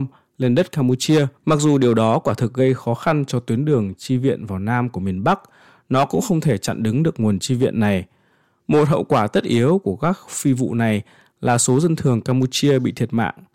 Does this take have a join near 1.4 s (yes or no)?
yes